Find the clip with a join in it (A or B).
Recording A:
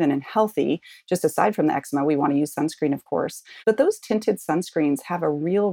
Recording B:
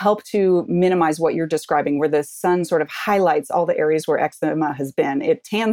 A